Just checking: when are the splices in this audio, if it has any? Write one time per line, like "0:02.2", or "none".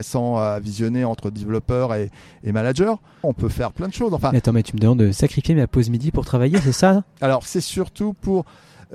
0:03.2
0:07.5